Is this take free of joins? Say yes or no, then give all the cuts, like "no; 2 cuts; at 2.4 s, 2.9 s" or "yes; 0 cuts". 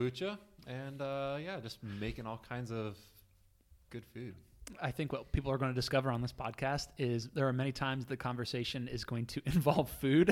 yes; 0 cuts